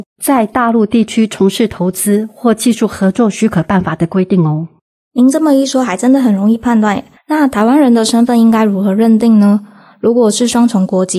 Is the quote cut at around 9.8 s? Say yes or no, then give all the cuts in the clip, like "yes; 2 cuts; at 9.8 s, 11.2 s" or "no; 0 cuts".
no; 1 cut; at 7.2 s